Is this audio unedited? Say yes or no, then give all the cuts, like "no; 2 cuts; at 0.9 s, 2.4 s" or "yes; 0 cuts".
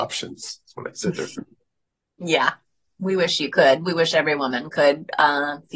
yes; 0 cuts